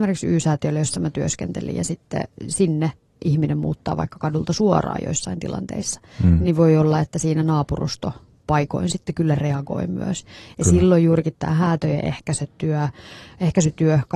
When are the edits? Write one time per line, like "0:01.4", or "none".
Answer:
none